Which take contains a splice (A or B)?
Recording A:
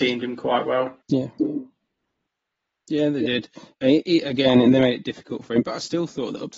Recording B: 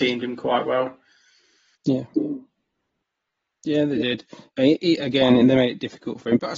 A